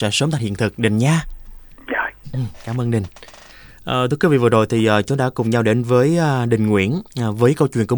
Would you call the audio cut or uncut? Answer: cut